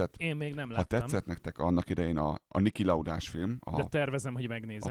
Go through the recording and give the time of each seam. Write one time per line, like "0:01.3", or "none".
none

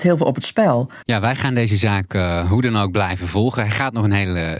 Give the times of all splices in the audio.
0:01.0

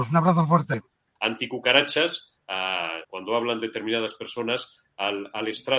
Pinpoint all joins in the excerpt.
0:01.2
0:03.0

